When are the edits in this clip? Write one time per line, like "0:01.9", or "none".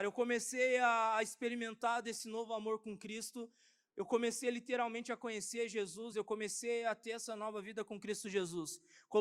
0:06.1

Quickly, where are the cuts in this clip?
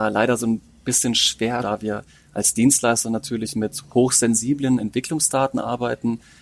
0:01.6

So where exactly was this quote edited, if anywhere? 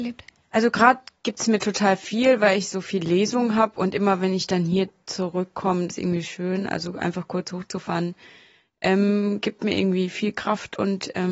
0:05.9

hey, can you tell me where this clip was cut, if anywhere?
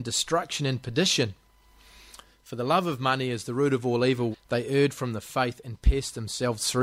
0:04.3

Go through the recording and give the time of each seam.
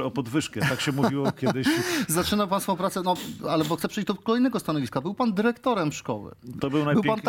0:03.8

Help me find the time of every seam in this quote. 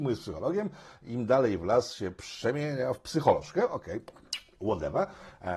none

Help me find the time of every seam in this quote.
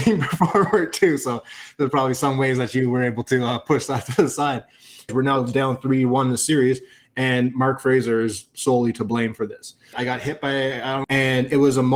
0:05.1
0:09.9
0:11.0

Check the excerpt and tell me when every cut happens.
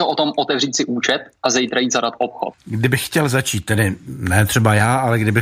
0:02.6

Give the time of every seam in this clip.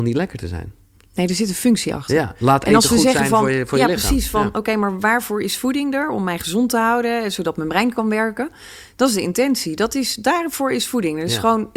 none

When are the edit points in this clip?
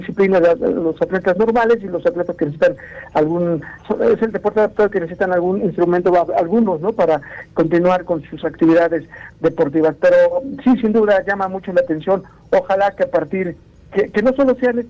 0:02.4

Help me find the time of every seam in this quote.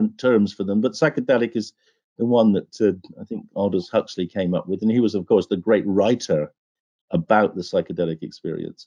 none

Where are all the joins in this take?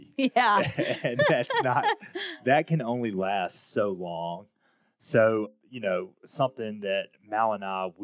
none

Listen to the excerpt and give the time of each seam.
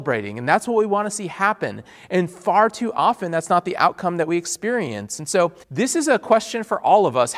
0:05.6

